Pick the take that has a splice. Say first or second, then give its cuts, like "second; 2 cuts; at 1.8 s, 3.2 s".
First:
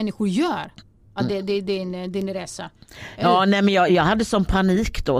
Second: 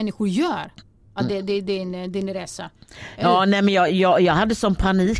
first; 1 cut; at 3.9 s